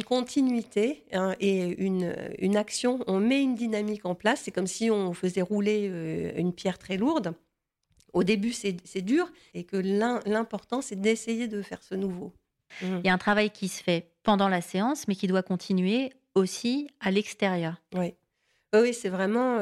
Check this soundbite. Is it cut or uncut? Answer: cut